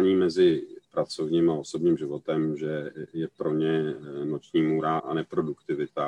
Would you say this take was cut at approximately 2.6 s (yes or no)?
no